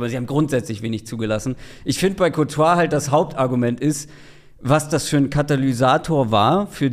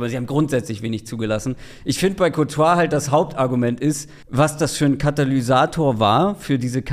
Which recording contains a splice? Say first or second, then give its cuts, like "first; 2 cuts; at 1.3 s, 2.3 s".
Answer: second; 1 cut; at 4.2 s